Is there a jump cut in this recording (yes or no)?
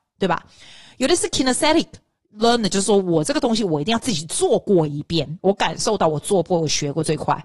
no